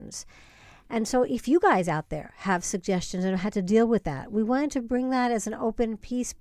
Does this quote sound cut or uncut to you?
uncut